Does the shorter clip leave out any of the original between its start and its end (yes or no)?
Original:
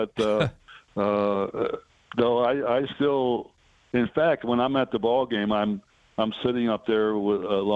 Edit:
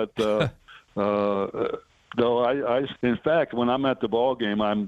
yes